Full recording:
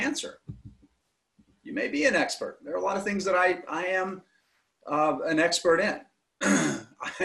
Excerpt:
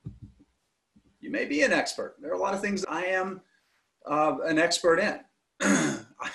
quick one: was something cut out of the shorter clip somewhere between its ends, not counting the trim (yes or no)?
yes